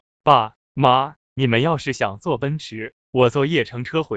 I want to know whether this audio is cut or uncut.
cut